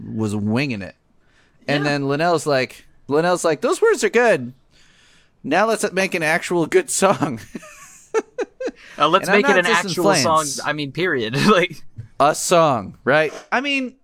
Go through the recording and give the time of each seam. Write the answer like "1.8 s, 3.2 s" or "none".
none